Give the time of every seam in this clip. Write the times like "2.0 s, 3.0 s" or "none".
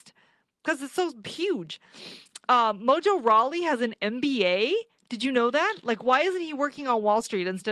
none